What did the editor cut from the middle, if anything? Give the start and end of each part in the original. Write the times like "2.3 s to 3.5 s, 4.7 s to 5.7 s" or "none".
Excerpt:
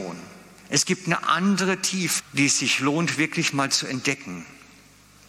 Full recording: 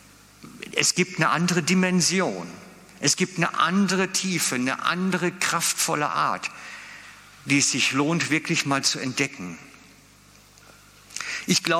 4.5 s to 7.3 s